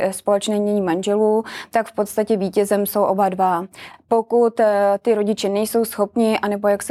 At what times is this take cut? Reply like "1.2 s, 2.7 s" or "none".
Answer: none